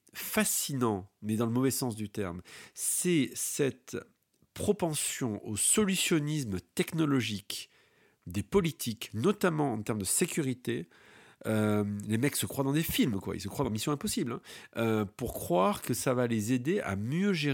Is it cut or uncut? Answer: uncut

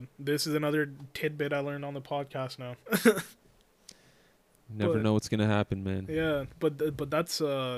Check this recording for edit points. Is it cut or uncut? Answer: uncut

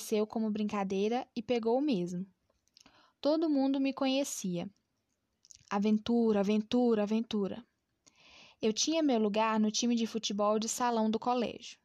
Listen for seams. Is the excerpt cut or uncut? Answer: uncut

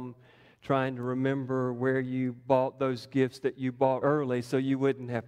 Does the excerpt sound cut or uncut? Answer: cut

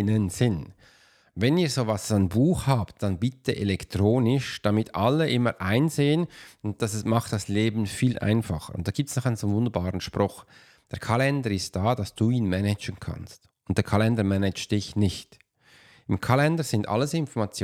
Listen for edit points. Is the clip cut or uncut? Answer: uncut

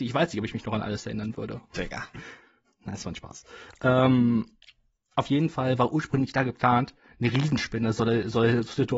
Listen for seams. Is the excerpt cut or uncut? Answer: uncut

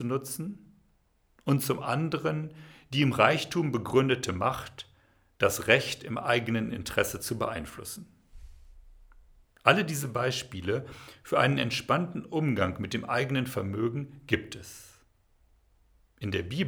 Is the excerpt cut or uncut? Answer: cut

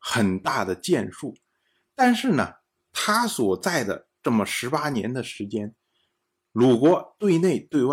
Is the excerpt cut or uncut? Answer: uncut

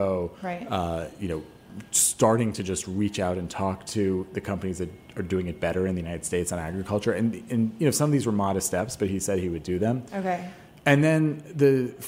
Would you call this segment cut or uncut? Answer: uncut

